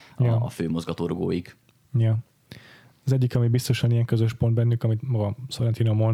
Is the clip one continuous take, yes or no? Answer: yes